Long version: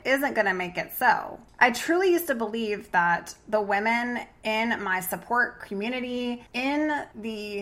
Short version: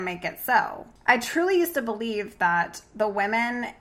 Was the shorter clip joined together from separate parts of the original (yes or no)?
no